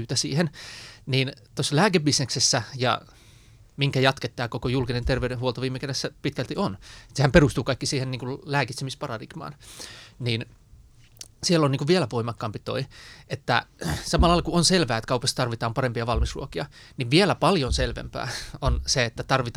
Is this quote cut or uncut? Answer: uncut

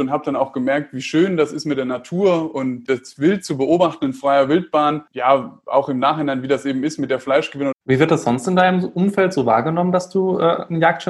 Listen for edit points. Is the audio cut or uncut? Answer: cut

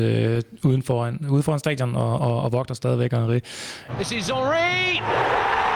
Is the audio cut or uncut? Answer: cut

